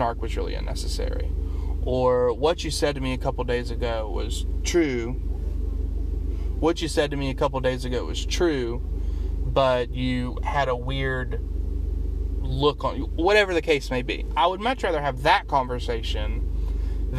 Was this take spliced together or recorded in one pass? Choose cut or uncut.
uncut